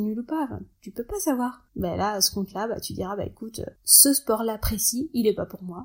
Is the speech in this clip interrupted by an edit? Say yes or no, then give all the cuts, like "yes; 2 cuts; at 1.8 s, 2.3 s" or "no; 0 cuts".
yes; 1 cut; at 1.7 s